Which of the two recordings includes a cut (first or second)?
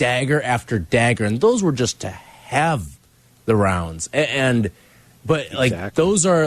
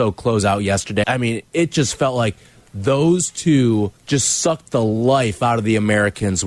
second